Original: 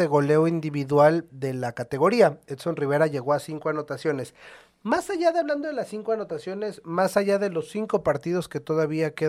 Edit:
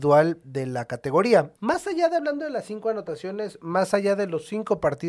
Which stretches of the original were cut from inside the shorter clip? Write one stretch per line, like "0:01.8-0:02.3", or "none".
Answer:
0:02.4-0:04.8